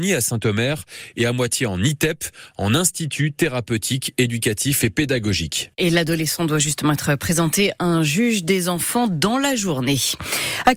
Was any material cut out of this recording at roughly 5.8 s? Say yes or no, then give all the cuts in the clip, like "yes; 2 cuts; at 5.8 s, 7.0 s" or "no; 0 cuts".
no; 0 cuts